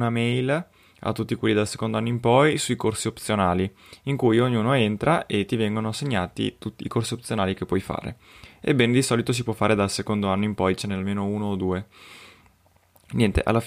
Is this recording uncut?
yes; 0 cuts

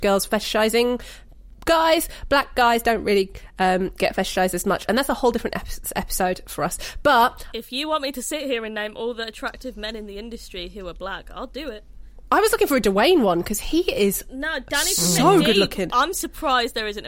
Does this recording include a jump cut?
no; 0 cuts

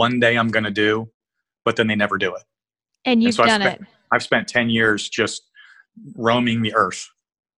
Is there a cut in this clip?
no; 0 cuts

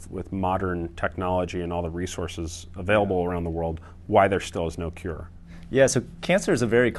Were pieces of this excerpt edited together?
no; 0 cuts

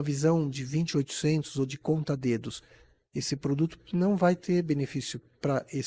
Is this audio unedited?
yes; 0 cuts

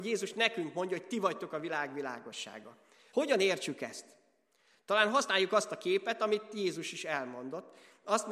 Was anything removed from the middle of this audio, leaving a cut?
no; 0 cuts

